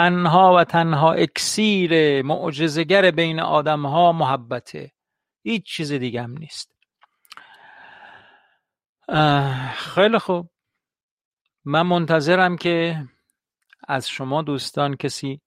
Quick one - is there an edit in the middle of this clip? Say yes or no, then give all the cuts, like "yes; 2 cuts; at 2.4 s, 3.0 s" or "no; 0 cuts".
no; 0 cuts